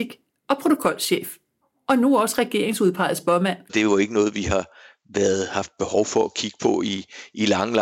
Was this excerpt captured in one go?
no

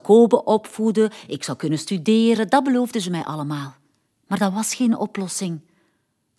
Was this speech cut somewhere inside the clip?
no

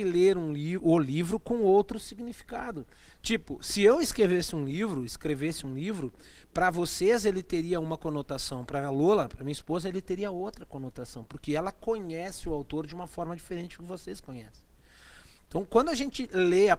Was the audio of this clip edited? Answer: no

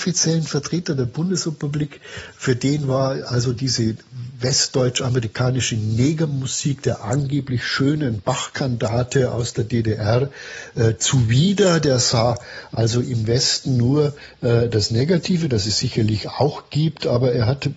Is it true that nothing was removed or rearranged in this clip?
yes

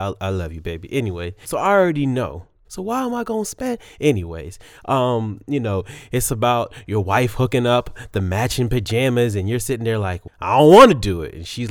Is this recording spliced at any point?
yes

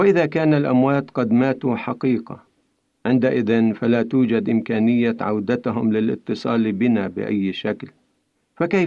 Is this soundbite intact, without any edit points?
yes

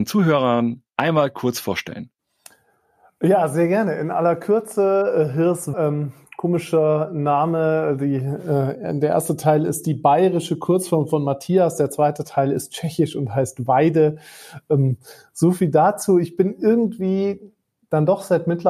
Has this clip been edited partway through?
yes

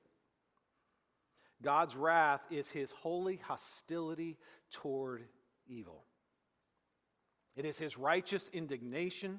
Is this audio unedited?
yes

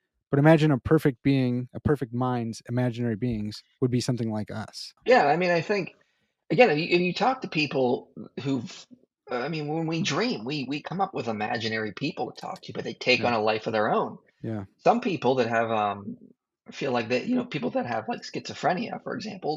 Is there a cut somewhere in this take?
yes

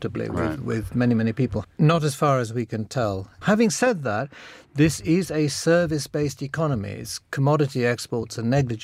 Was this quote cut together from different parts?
yes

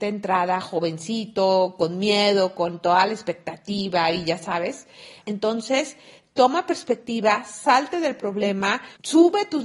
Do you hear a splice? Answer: yes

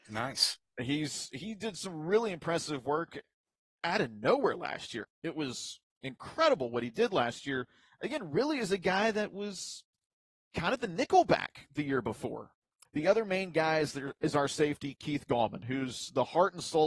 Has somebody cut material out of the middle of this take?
yes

